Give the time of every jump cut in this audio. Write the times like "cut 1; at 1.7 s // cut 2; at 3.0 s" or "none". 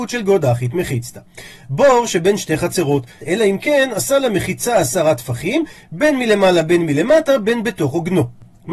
cut 1; at 1.6 s // cut 2; at 3.2 s